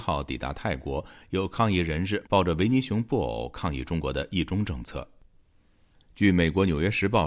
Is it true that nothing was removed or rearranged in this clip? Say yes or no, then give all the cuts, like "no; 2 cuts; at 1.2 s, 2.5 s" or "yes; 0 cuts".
yes; 0 cuts